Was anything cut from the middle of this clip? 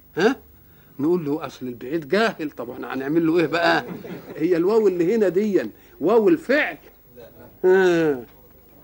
yes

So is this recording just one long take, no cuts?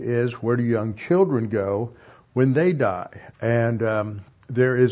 no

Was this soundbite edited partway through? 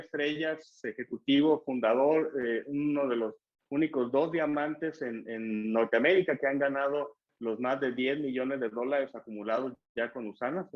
no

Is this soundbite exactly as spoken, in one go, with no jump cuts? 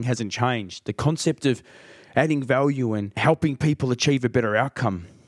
yes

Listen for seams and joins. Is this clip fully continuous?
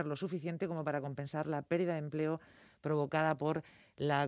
yes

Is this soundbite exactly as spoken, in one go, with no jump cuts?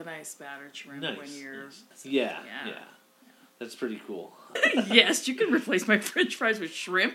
no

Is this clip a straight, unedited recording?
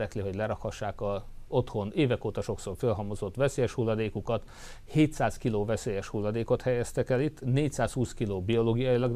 yes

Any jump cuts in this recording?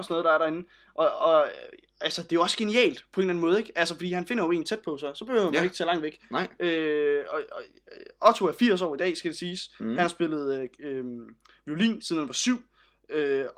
no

